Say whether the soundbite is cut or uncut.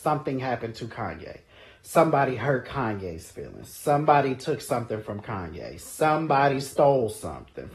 uncut